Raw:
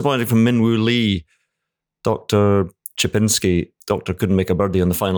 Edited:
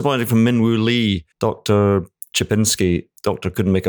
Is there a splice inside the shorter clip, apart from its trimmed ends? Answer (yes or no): yes